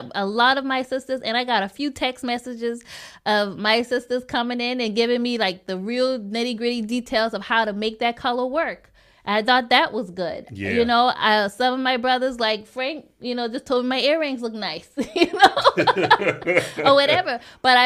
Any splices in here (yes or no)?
no